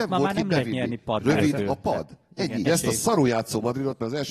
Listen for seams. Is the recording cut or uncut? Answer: cut